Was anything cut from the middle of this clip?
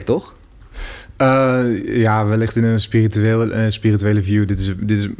no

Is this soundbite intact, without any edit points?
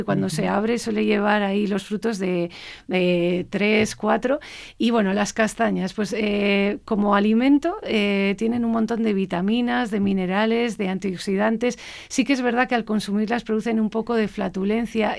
yes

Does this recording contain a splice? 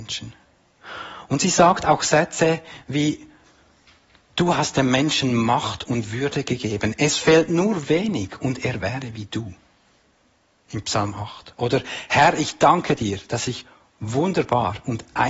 no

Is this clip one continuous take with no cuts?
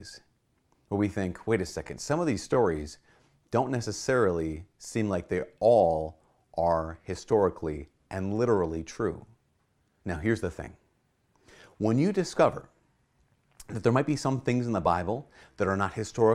yes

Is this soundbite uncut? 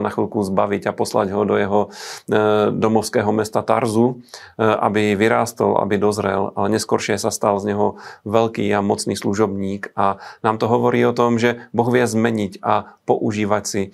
yes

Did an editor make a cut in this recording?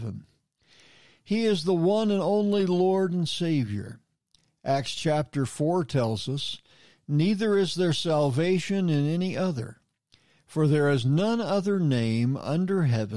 no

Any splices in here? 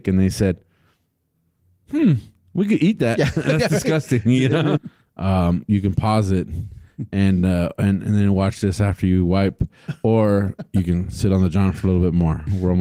yes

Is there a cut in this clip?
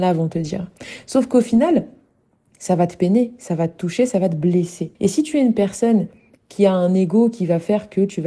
yes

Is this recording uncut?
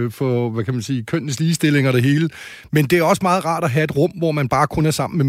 yes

